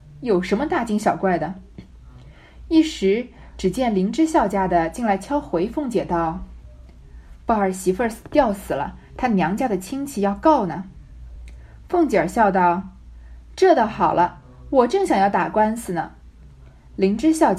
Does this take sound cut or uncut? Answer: uncut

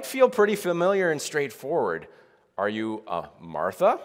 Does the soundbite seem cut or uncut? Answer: uncut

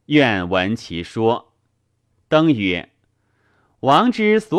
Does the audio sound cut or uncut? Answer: uncut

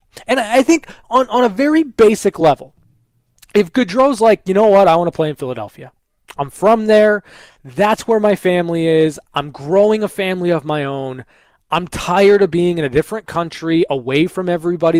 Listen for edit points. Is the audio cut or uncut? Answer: uncut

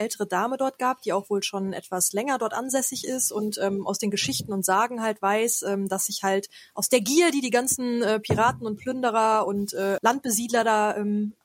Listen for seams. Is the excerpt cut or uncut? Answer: cut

